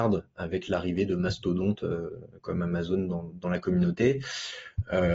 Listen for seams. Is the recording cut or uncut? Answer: cut